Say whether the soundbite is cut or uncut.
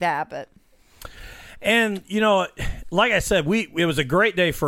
uncut